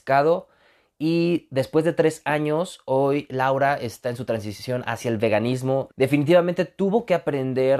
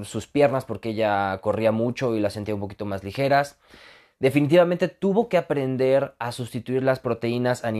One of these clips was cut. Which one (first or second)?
first